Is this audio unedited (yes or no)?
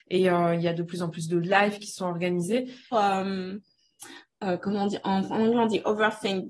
no